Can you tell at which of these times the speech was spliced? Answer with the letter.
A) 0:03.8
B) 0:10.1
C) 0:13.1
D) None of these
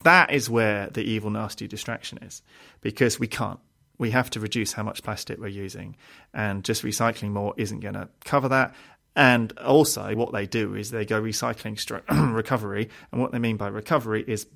B